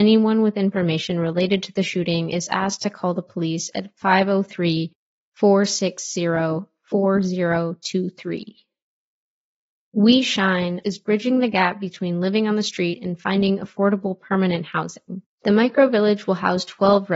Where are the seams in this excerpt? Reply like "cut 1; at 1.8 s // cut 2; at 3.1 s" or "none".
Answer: cut 1; at 10.8 s // cut 2; at 15.4 s